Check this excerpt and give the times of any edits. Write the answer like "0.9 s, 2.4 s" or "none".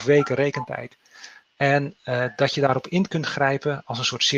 1.4 s